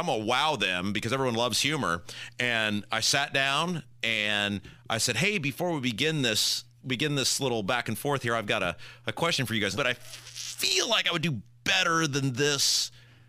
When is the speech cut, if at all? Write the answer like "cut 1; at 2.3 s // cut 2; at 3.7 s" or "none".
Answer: cut 1; at 9.8 s